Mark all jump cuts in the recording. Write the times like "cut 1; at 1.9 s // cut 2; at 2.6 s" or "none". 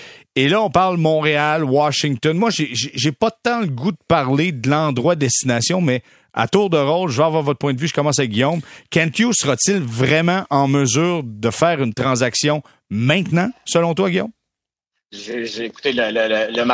none